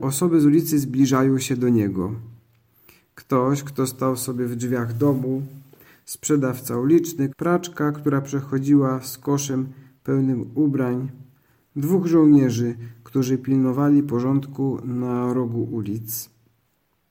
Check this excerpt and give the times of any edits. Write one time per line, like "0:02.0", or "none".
0:07.3